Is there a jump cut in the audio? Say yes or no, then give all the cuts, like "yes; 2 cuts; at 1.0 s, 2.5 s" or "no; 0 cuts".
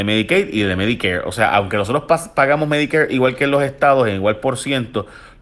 no; 0 cuts